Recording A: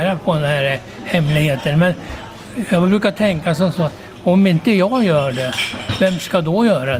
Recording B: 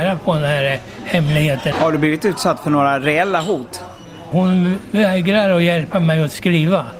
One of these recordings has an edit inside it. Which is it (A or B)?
B